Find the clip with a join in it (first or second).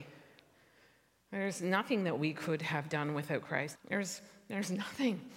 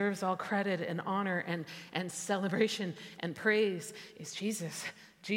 first